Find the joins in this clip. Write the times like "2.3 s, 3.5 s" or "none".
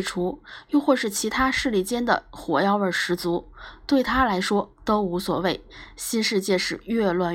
none

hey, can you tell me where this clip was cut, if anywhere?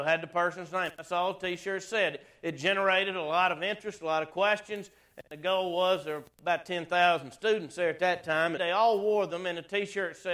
8.6 s

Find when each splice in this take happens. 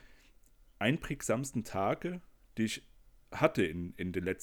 none

